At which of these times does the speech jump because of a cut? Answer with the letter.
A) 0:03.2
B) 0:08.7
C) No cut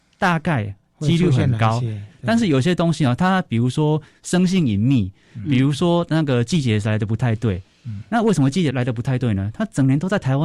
B